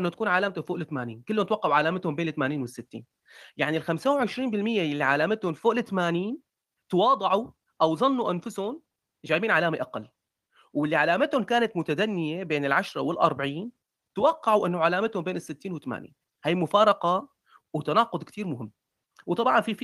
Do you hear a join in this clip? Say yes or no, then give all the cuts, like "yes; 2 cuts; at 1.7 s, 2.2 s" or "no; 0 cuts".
no; 0 cuts